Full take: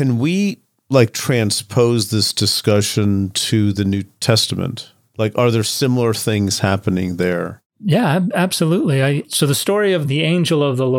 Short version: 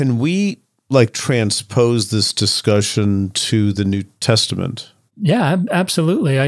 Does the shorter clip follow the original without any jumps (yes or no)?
no